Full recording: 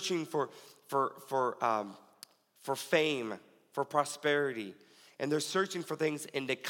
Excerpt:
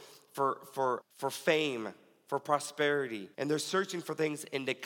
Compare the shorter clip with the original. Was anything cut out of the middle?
yes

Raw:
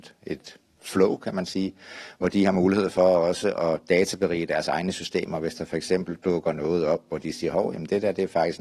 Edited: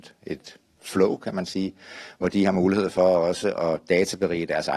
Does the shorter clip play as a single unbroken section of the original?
yes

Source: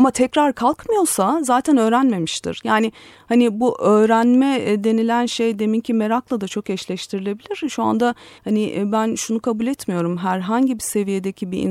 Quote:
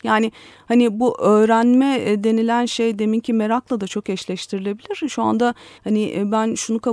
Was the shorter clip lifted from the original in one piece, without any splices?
yes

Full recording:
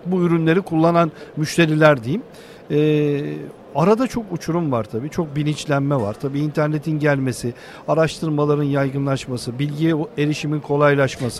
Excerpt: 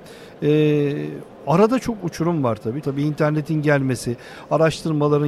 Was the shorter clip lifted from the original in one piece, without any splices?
no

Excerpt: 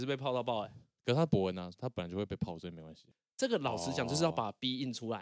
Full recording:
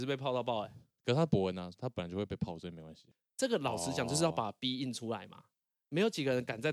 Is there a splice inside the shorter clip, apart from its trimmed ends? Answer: no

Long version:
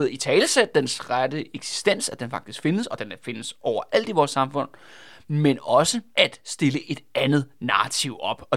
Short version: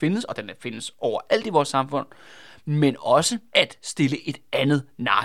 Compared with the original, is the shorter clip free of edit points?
yes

